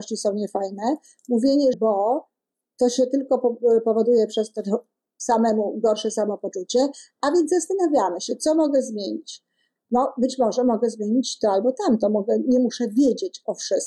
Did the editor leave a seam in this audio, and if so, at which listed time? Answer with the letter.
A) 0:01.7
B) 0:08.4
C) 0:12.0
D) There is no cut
A